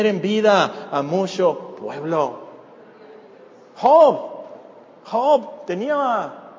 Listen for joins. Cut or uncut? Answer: uncut